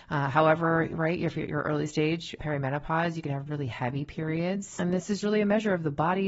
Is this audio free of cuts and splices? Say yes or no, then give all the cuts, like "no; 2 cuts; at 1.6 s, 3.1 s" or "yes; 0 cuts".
no; 2 cuts; at 2.4 s, 5.2 s